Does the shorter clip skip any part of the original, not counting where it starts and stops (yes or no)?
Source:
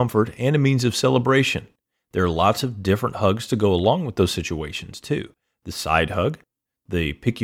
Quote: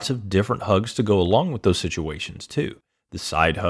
no